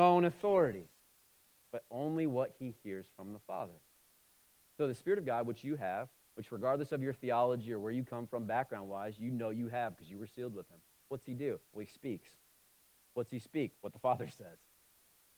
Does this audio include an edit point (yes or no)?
no